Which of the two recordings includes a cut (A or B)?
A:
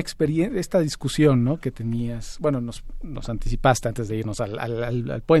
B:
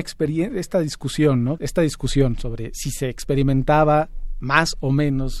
B